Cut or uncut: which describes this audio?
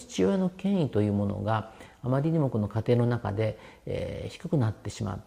uncut